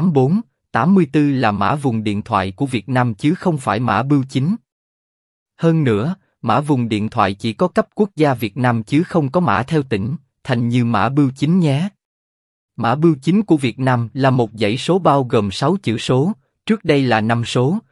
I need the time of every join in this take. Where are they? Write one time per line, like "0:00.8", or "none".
0:12.7